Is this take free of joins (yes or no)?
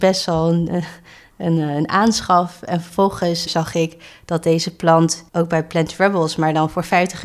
no